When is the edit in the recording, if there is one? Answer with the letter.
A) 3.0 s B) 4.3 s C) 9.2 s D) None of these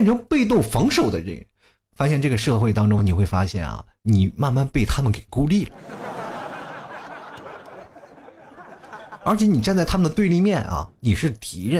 D